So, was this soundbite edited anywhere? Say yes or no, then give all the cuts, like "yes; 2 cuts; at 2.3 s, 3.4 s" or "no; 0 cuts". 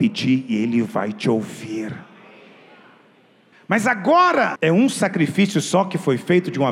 yes; 2 cuts; at 3.5 s, 4.6 s